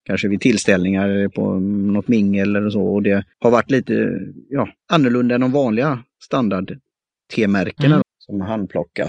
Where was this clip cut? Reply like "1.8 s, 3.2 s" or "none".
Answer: 3.3 s, 4.8 s, 8.0 s